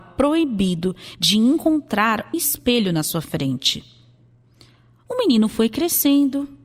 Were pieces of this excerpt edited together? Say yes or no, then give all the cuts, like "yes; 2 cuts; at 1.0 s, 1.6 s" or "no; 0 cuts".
yes; 1 cut; at 2.3 s